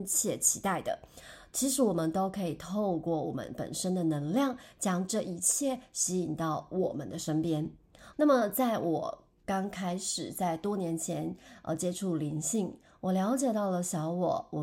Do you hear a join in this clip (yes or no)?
yes